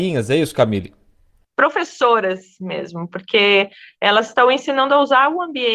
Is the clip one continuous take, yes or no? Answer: yes